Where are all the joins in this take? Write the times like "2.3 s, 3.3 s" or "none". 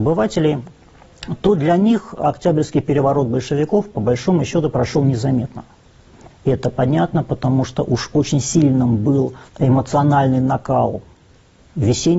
6.3 s, 9.5 s